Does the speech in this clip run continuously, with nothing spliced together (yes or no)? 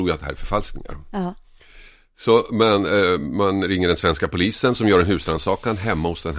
yes